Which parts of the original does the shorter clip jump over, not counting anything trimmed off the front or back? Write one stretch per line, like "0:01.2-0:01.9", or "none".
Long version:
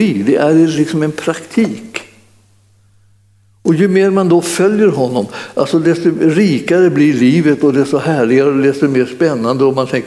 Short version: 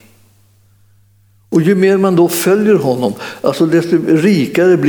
none